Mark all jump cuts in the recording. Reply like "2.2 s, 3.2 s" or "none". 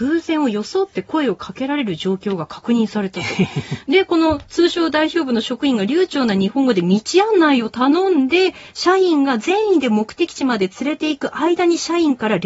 none